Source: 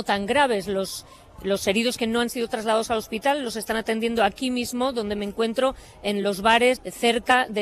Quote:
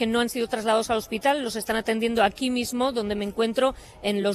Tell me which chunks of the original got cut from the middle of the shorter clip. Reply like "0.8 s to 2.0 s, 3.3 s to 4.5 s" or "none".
none

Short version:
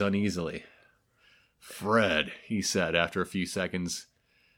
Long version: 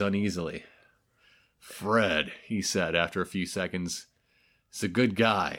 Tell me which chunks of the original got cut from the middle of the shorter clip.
none

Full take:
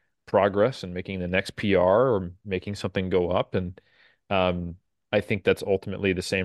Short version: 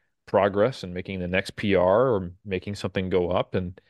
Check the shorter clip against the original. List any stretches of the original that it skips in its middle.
none

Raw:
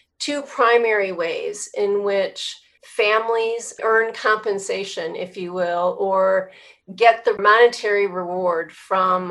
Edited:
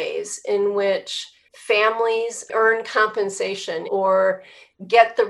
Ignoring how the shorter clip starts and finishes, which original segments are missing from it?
5.2 s to 5.9 s

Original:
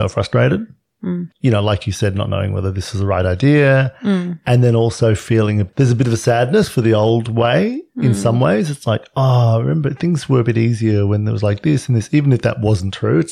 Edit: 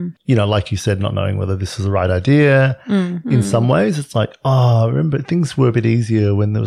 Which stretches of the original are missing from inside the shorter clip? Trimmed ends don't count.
4.4 s to 8.0 s

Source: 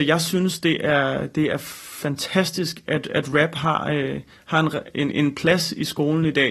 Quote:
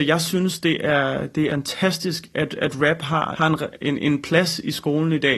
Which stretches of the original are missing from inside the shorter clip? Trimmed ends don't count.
1.5 s to 2.0 s, 3.8 s to 4.4 s

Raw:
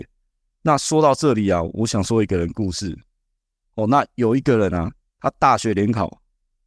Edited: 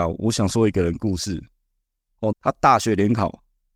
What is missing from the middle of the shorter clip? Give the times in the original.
3.9 s to 5.1 s

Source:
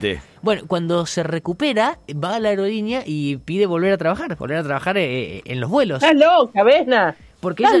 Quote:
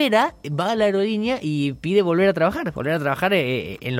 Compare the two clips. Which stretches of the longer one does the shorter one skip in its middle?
none

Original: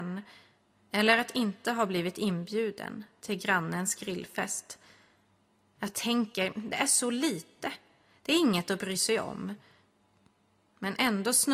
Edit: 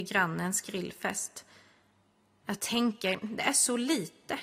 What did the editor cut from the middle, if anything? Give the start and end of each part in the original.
none

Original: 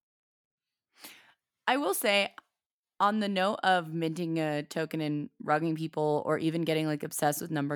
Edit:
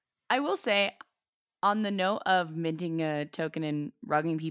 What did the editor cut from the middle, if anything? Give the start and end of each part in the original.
none

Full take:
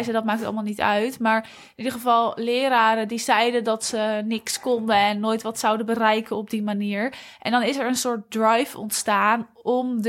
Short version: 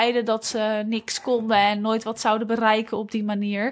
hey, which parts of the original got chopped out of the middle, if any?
none

